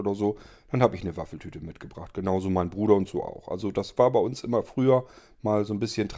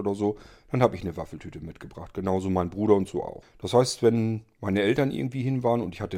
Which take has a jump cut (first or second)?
second